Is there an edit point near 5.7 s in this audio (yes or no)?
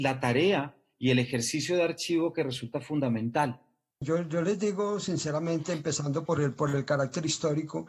no